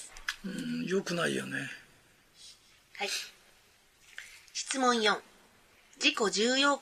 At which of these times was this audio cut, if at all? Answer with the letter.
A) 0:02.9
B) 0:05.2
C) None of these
A